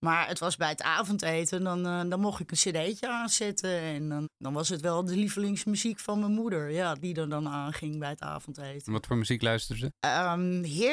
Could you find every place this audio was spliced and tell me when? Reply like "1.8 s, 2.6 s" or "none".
4.2 s, 9.9 s